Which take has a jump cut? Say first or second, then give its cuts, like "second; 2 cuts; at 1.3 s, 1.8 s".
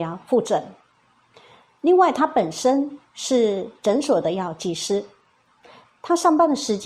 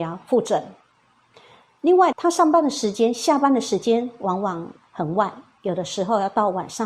second; 1 cut; at 2.1 s